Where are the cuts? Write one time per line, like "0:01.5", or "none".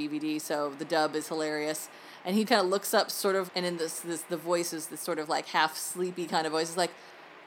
0:02.5
0:03.5